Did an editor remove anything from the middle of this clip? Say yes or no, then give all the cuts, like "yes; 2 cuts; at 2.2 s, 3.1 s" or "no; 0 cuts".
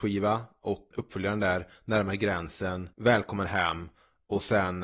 yes; 2 cuts; at 0.9 s, 2.9 s